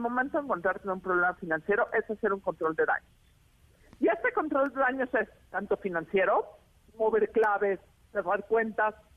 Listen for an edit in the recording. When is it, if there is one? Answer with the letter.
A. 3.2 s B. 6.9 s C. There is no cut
C